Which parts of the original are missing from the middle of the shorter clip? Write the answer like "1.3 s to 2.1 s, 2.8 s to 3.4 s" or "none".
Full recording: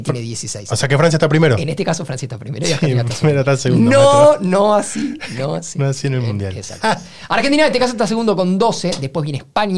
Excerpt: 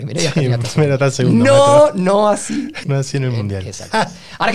5.3 s to 5.7 s